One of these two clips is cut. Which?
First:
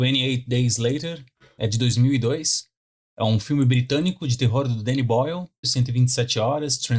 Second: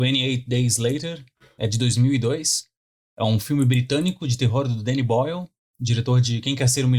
first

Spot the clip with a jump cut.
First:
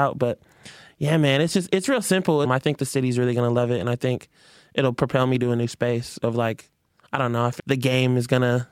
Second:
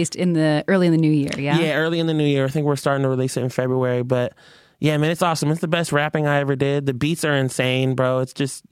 first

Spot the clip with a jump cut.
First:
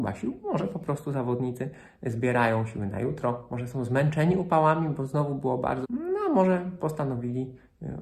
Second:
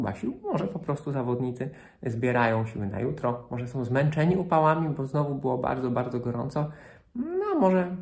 first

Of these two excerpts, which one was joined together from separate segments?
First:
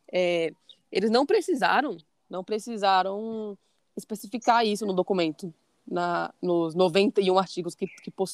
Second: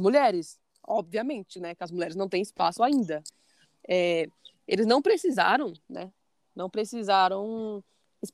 first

